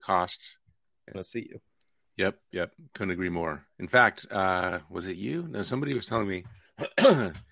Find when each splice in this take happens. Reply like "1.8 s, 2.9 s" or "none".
1.1 s, 2.5 s